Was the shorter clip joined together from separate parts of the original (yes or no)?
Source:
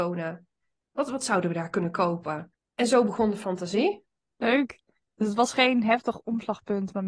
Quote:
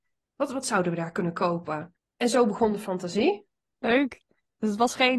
no